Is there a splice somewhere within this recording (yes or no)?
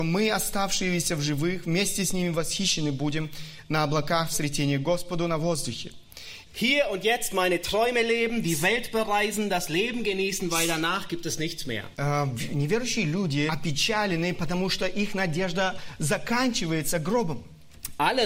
yes